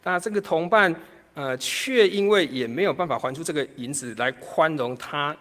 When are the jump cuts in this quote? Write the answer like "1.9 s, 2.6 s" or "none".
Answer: none